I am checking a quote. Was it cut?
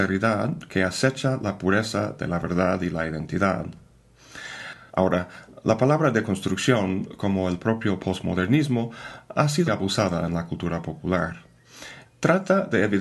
yes; 3 cuts; at 4.9 s, 9.7 s, 12.1 s

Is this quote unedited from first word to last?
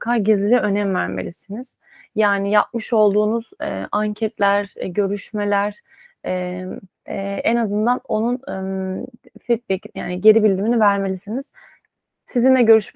no; 1 cut; at 7.1 s

